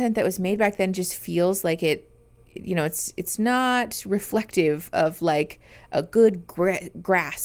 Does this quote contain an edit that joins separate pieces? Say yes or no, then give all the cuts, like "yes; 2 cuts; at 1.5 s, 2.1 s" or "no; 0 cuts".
no; 0 cuts